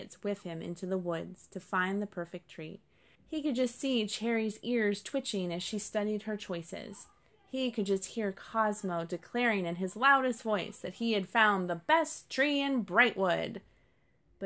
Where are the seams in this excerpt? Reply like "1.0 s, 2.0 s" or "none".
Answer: 3.2 s